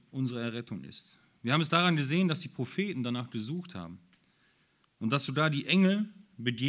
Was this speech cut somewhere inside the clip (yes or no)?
no